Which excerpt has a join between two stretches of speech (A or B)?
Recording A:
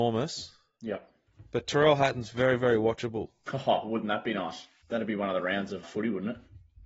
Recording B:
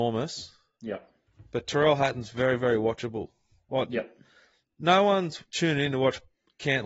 A